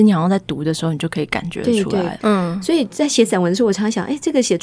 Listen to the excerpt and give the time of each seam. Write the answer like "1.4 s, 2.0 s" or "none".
2.2 s